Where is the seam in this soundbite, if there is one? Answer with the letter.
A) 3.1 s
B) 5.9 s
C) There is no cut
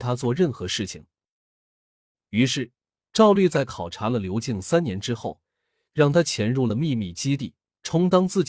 C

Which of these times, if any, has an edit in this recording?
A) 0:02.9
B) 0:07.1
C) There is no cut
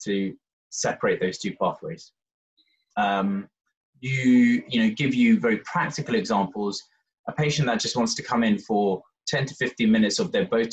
A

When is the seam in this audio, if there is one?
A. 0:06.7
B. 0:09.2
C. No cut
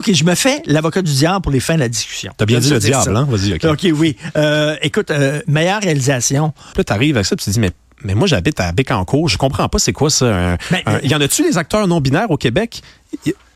A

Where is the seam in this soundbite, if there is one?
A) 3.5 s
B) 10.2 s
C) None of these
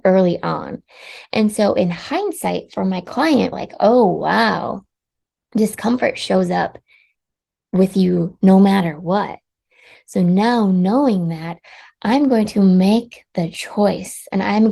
A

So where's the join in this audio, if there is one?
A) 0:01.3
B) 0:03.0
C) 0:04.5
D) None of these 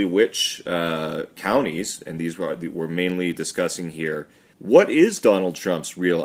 C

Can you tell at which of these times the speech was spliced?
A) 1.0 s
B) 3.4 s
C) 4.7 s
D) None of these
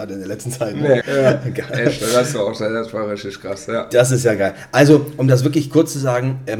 A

